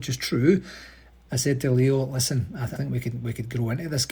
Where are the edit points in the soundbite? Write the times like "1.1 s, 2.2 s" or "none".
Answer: 1.3 s, 2.8 s